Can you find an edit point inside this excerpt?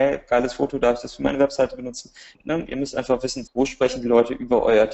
yes; 2 cuts; at 2.3 s, 3.5 s

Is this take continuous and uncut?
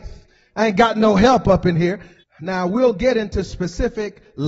no; 1 cut; at 2.2 s

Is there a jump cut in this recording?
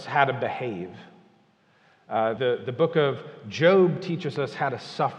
yes; 1 cut; at 2.4 s

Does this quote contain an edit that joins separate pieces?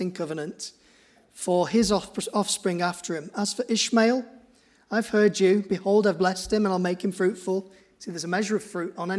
no; 0 cuts

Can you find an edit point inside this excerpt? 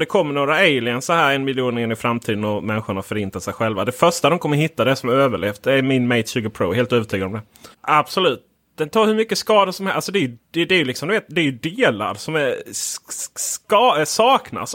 yes; 1 cut; at 7.7 s

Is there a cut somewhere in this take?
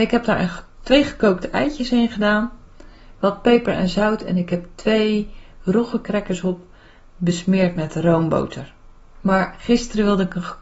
yes; 1 cut; at 9.2 s

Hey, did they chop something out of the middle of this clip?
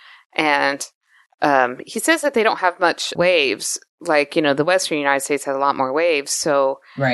yes; 1 cut; at 3.2 s

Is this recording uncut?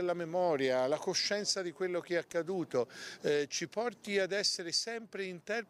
yes; 0 cuts

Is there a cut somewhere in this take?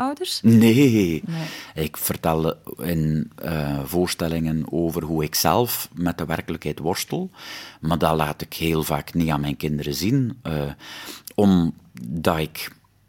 yes; 1 cut; at 1.2 s

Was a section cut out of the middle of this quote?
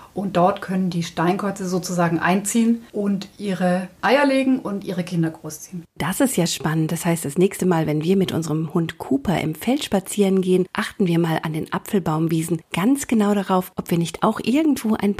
yes; 1 cut; at 2.9 s

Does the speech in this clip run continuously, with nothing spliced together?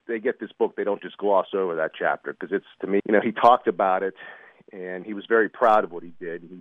no; 1 cut; at 3.0 s

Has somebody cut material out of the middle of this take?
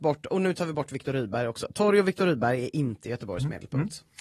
no; 0 cuts

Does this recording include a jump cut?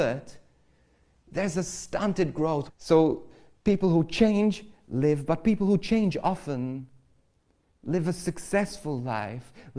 yes; 1 cut; at 2.7 s

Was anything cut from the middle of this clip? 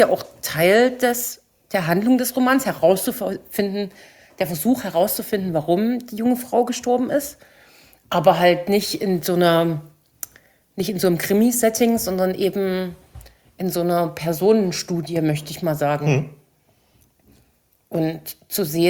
no; 0 cuts

